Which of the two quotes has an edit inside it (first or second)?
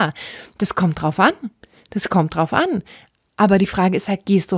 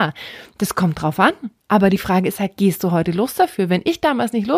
second